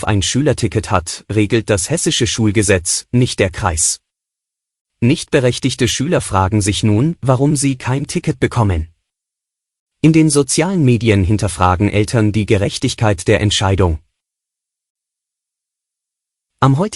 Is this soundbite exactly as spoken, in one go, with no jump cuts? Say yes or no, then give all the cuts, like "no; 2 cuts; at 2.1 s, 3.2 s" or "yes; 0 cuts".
yes; 0 cuts